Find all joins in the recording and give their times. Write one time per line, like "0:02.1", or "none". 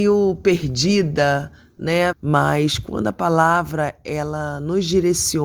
0:02.1